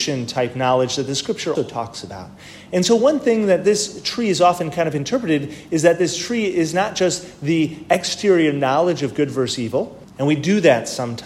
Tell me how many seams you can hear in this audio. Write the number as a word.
two